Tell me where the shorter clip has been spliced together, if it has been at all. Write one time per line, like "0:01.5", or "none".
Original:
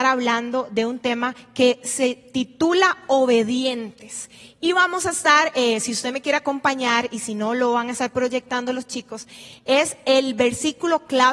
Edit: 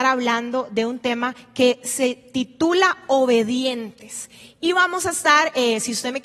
none

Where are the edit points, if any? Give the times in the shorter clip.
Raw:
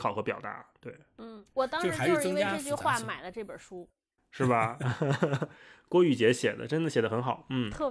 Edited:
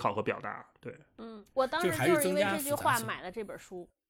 none

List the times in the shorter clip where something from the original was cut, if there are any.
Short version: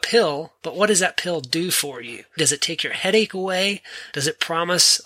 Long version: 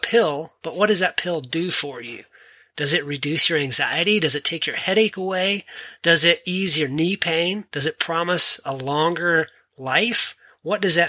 0:02.4
0:04.1

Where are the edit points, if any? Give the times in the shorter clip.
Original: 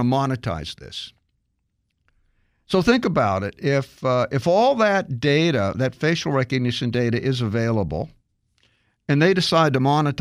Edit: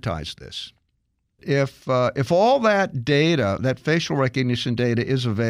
0:01.4

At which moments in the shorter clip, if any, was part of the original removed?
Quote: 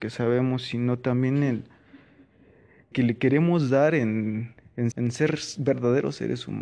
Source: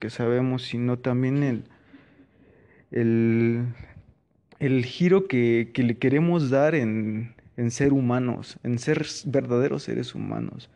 0:02.9
0:04.9

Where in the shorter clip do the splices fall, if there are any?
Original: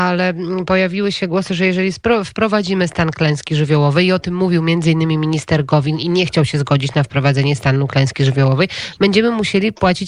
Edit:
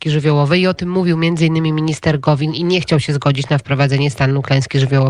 none

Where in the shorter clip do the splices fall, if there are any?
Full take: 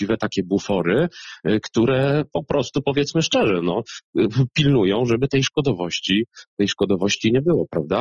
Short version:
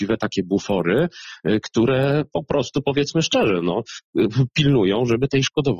none

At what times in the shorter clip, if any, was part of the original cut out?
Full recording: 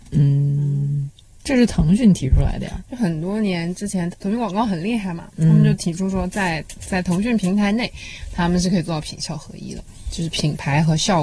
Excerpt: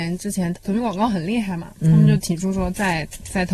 none

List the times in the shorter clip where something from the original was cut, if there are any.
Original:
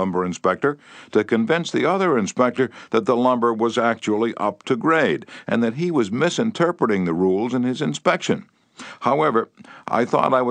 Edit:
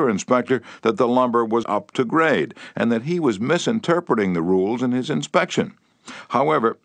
0:01.6

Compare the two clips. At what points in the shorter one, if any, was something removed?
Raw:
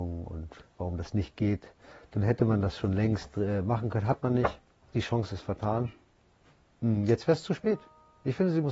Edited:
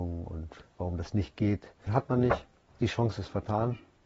0:01.9

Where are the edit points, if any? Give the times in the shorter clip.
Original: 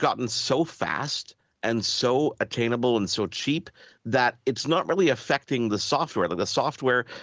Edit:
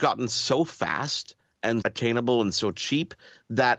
0:01.8

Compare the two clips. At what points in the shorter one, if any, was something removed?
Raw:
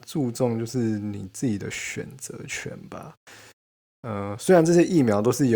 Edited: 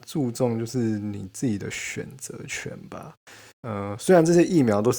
0:03.5

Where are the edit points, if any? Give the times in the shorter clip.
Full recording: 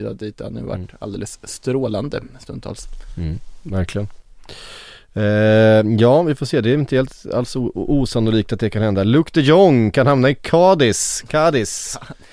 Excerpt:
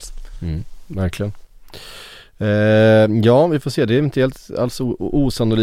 none

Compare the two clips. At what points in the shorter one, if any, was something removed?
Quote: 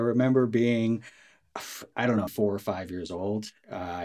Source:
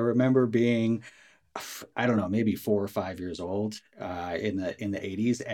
0:02.3

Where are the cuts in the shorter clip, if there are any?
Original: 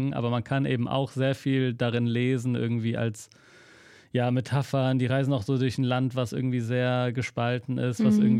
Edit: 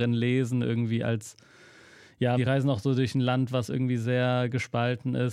0:02.4

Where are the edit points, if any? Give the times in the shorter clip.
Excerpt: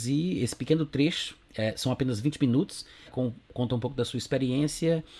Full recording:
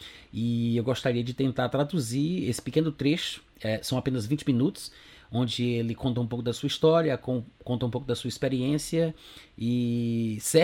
0:03.1

